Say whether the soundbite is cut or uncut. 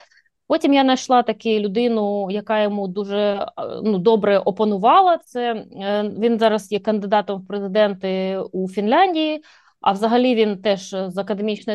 uncut